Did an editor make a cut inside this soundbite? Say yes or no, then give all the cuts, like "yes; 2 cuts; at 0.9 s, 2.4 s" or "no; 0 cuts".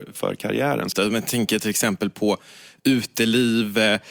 yes; 1 cut; at 0.9 s